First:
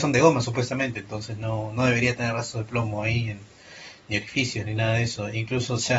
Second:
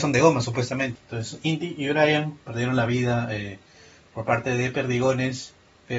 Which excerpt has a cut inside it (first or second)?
second